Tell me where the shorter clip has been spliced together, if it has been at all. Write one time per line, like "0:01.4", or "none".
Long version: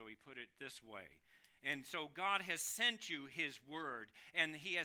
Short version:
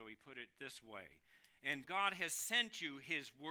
0:01.8